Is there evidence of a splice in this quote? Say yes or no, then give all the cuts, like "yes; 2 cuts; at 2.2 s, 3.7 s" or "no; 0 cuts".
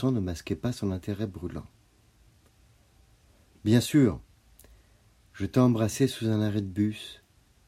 no; 0 cuts